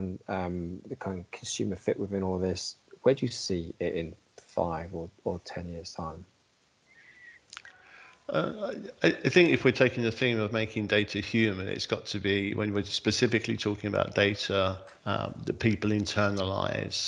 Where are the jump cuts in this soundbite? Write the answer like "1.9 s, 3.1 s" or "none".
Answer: 15.0 s

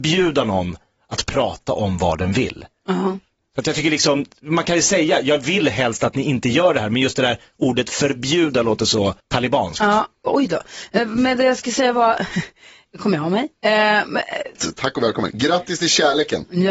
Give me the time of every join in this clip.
9.2 s, 14.6 s

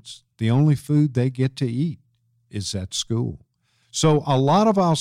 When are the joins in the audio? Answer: 3.8 s

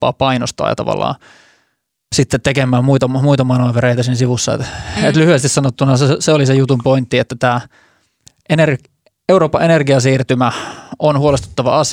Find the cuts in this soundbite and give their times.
none

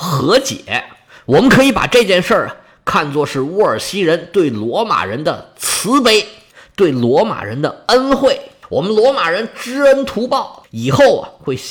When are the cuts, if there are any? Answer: none

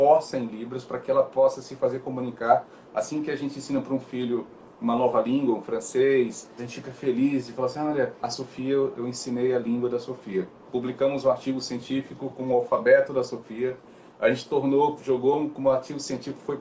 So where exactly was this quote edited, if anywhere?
6.6 s, 8.2 s

